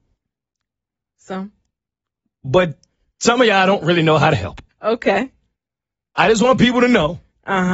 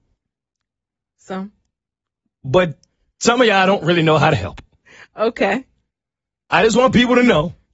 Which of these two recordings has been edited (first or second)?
first